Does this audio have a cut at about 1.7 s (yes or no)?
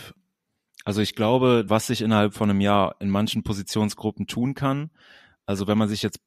yes